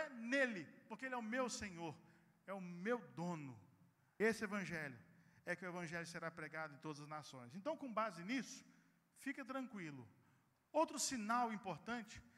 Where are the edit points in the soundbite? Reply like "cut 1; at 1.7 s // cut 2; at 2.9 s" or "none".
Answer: cut 1; at 4.2 s // cut 2; at 10.5 s